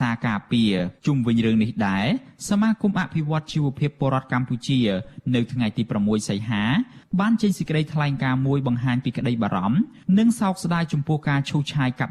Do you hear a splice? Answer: yes; 1 cut; at 1.0 s

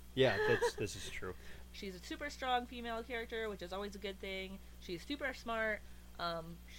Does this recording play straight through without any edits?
no; 1 cut; at 1.7 s

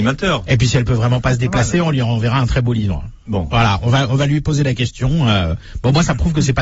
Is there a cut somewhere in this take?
no; 0 cuts

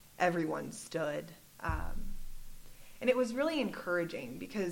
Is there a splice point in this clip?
no; 0 cuts

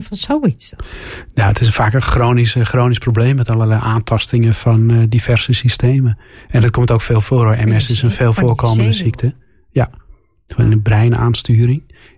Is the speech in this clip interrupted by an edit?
no; 0 cuts

